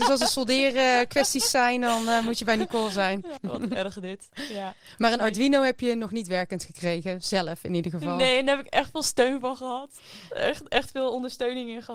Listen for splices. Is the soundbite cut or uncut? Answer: cut